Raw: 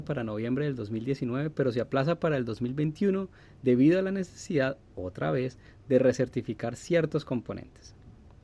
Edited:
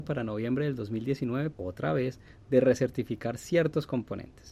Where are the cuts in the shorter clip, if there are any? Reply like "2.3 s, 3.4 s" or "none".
1.5 s

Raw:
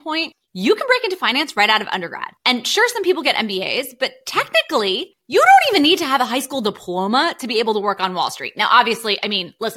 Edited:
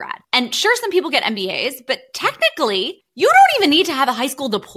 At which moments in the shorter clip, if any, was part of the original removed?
none

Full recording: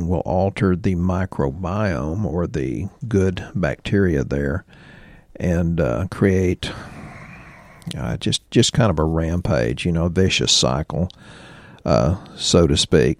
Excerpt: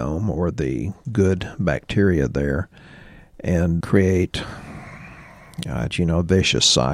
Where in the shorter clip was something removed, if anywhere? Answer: 3.8 s, 5.9 s

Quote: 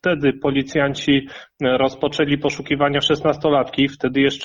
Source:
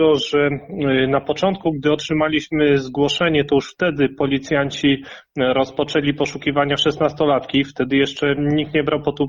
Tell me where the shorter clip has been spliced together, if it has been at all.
none

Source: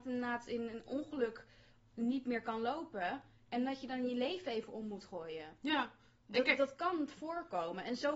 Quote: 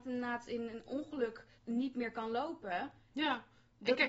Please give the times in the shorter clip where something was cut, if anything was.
1.6 s, 3.1 s

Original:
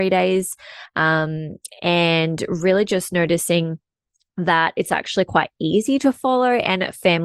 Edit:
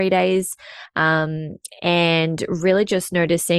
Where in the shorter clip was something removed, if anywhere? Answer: none

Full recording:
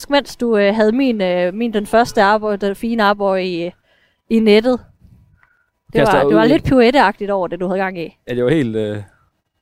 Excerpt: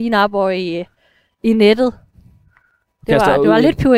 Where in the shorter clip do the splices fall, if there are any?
none

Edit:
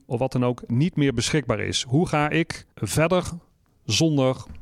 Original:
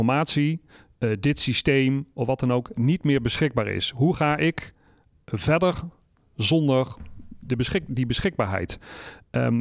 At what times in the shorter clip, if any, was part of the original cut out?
2.7 s

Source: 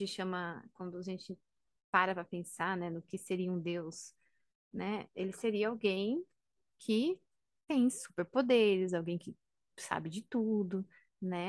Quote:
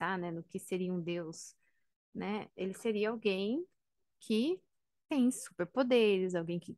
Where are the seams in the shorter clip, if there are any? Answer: none

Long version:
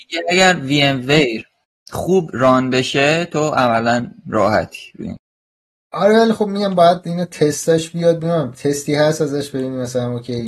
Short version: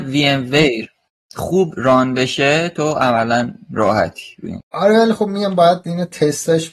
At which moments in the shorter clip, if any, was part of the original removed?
4.6 s

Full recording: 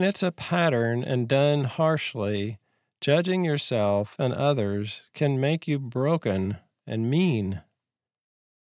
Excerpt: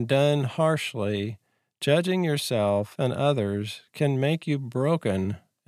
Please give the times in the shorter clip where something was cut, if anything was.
none

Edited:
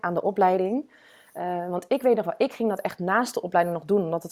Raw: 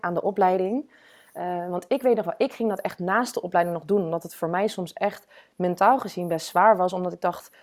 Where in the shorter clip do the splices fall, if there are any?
none

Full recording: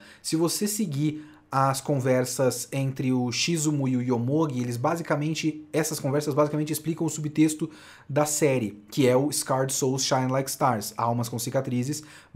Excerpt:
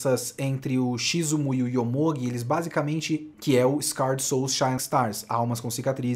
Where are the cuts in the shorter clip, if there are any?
3.3 s, 4.8 s

